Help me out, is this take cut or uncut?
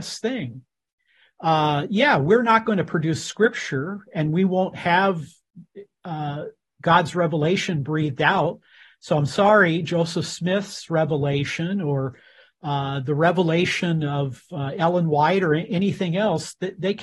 uncut